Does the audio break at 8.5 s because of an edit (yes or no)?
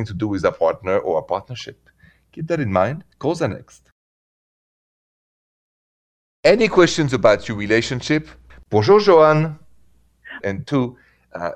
yes